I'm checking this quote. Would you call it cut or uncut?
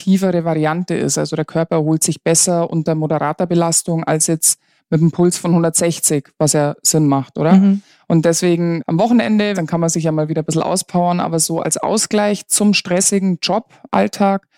cut